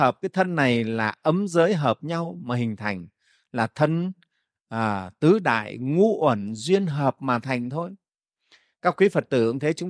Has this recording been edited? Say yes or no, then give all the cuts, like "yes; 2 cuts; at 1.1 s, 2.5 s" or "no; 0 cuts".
no; 0 cuts